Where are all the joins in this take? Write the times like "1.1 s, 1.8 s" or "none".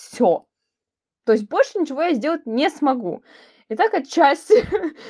none